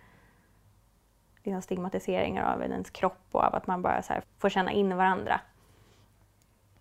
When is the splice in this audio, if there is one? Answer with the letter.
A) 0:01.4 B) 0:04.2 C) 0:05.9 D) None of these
B